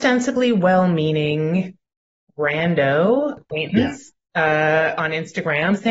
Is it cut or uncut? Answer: uncut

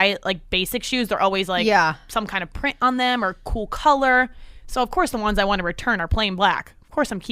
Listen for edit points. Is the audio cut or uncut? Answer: uncut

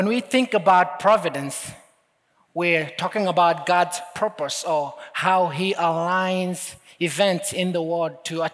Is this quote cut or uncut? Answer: uncut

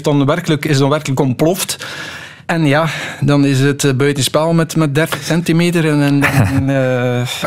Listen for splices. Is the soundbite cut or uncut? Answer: cut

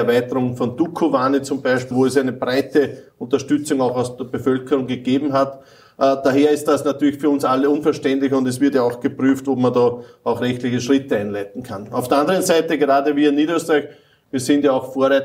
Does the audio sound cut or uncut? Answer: cut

